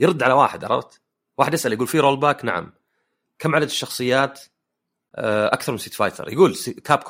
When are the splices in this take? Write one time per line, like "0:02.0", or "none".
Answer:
none